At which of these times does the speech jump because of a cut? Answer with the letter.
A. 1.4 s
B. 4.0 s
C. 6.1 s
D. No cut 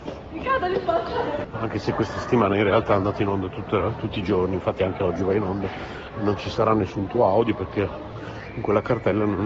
A